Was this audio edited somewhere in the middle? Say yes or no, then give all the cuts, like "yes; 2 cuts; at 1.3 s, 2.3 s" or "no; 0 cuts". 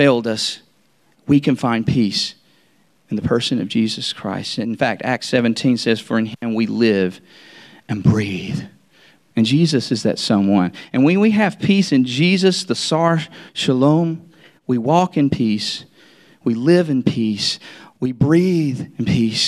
yes; 1 cut; at 9.2 s